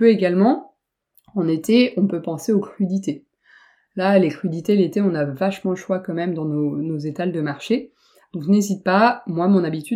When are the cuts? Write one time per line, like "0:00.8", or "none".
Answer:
none